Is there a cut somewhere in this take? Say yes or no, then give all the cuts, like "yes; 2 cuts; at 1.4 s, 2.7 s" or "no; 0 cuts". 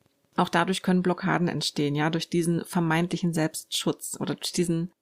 no; 0 cuts